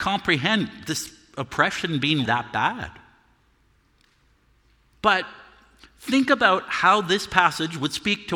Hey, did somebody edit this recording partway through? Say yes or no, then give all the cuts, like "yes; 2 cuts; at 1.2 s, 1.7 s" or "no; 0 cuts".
yes; 1 cut; at 2.3 s